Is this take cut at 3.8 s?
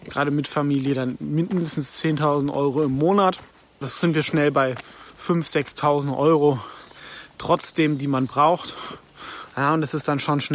yes; 1 cut; at 3.8 s

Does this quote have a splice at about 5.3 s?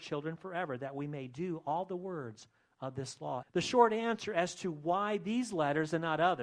no; 1 cut; at 3.4 s

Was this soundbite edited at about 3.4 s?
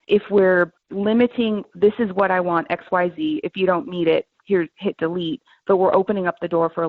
no; 0 cuts

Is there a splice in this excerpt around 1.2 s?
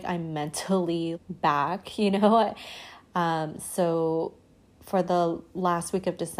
yes; 1 cut; at 1.2 s

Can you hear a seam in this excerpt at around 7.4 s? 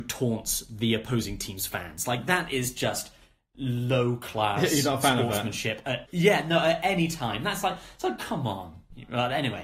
no; 1 cut; at 6.1 s

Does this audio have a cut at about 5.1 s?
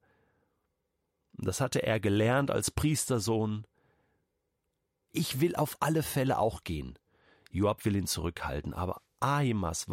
yes; 1 cut; at 5.1 s

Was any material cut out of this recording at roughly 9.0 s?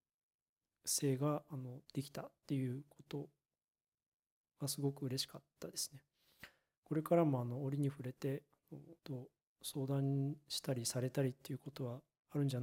yes; 2 cuts; at 1.8 s, 9.0 s

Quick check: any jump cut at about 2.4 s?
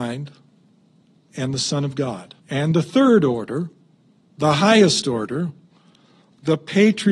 yes; 1 cut; at 2.4 s

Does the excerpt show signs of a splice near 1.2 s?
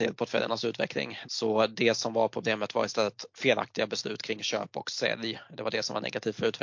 yes; 1 cut; at 1.2 s

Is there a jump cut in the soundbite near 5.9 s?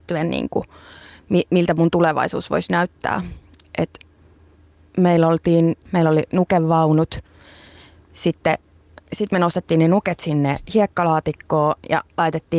yes; 1 cut; at 5.9 s

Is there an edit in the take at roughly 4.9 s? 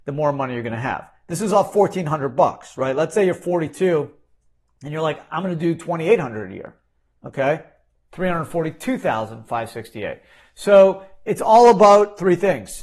no; 1 cut; at 8.1 s

